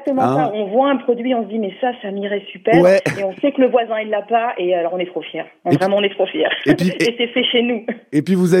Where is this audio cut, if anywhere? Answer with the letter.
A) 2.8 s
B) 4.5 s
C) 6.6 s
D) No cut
D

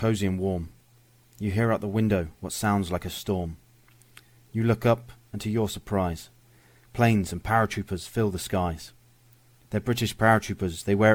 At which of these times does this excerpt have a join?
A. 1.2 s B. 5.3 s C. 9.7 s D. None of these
C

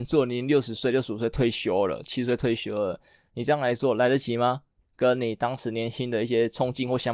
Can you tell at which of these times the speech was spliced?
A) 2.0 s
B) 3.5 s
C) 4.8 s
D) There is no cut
C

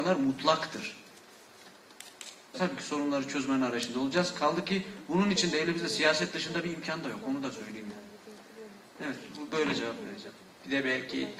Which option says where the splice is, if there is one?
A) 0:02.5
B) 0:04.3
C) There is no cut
A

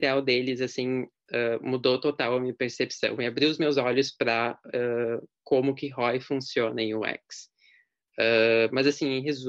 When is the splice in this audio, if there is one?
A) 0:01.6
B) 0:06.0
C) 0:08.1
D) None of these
D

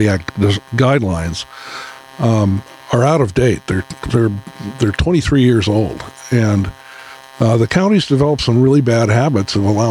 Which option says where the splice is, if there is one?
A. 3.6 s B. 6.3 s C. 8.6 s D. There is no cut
D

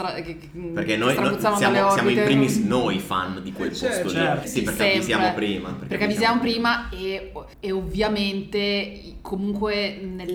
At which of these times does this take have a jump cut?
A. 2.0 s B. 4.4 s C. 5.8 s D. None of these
B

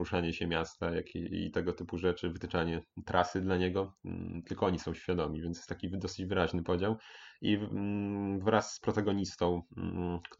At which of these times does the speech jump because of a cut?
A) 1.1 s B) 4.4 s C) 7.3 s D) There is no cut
D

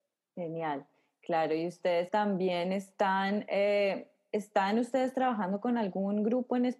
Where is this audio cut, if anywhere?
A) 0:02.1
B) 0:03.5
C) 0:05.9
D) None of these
A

